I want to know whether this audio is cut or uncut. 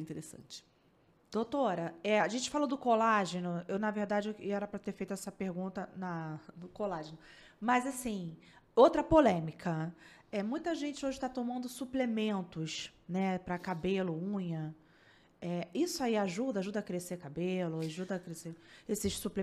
uncut